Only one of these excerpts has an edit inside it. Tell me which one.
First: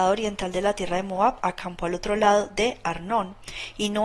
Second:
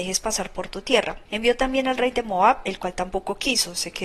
second; 1 cut; at 1.3 s

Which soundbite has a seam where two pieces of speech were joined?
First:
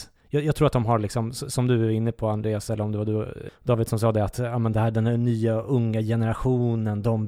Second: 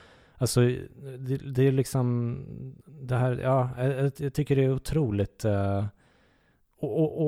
first; 1 cut; at 3.5 s

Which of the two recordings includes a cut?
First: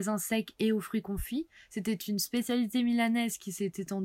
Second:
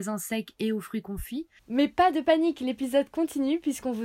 second; 1 cut; at 1.6 s

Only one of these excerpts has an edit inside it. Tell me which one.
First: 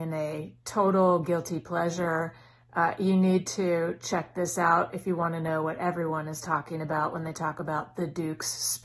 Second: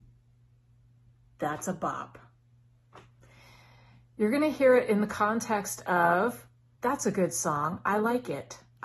second; 1 cut; at 6.8 s

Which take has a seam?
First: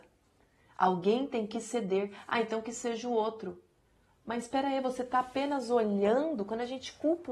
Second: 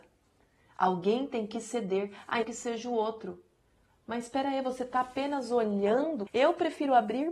second; 2 cuts; at 2.4 s, 6.3 s

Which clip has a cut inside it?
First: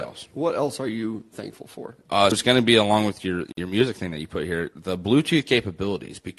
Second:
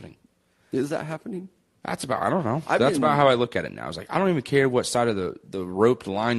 first; 1 cut; at 2.3 s

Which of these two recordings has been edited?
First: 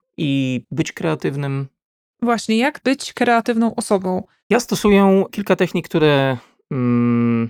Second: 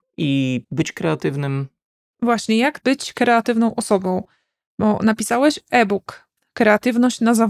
first; 1 cut; at 4.4 s

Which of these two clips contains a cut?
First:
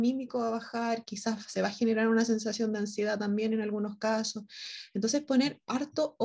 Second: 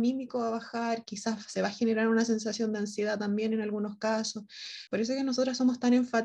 second; 1 cut; at 4.9 s

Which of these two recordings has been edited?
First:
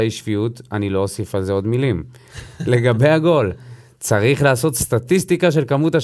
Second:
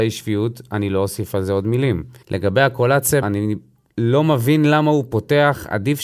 second; 2 cuts; at 2.2 s, 3.2 s

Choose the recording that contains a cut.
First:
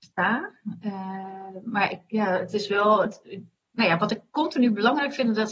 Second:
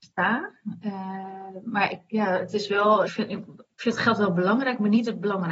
second; 1 cut; at 3.1 s

